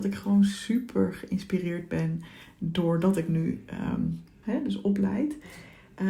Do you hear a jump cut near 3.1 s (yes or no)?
no